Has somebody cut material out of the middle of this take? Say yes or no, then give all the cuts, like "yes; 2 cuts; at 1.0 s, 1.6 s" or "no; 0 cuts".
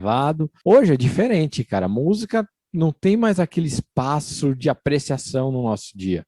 no; 0 cuts